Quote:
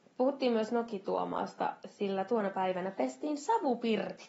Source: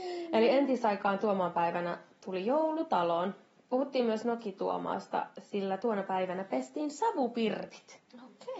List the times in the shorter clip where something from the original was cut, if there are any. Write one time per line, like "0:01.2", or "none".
none